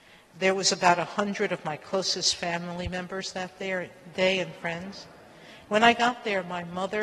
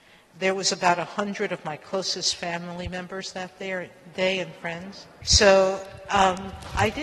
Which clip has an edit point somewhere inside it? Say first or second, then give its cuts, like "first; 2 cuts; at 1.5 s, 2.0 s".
second; 1 cut; at 5.2 s